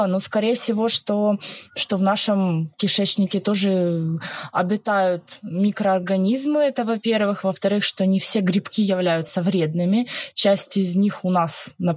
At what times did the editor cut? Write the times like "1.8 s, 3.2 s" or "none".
1.7 s